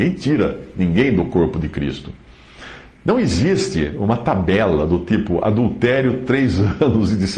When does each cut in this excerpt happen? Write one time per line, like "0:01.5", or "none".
none

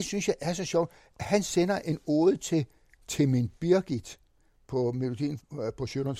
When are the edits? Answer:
none

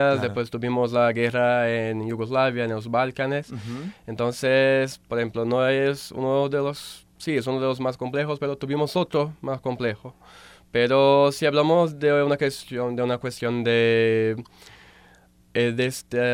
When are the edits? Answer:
0:07.1

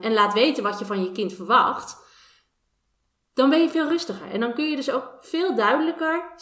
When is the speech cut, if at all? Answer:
none

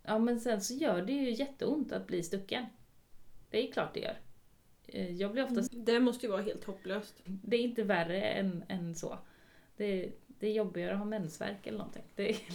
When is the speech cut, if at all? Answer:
0:05.7
0:07.3

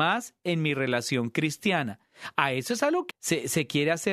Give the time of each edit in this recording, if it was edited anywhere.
0:03.1

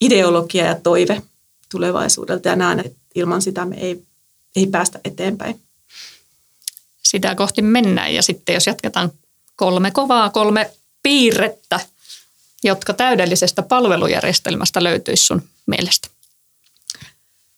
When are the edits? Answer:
0:02.8

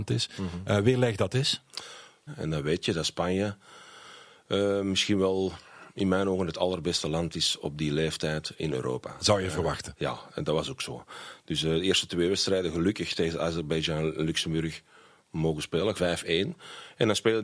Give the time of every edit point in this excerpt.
0:02.3
0:15.9

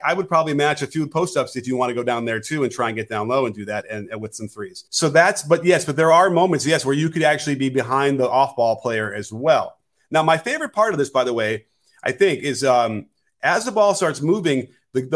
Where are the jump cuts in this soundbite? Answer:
0:04.9

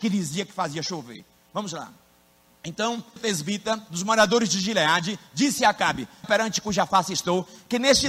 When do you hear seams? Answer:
0:03.2
0:06.2

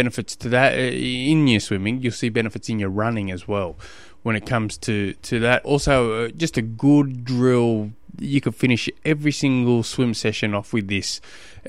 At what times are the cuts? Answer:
0:05.6

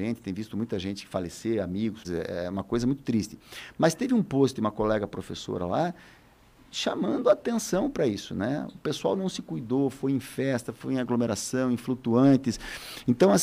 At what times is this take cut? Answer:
0:02.0

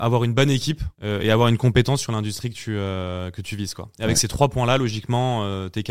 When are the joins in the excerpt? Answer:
0:00.9

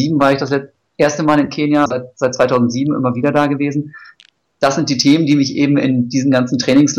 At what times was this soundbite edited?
0:01.9

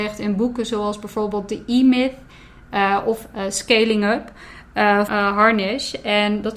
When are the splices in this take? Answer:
0:05.1

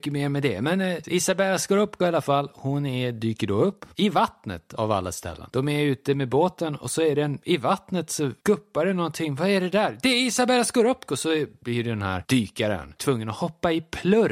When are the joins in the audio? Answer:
0:13.0

